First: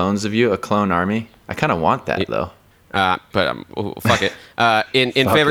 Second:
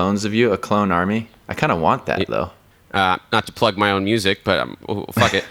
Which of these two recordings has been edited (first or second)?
first